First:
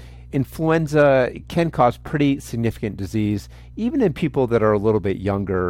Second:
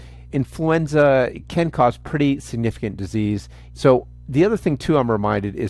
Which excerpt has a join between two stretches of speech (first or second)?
second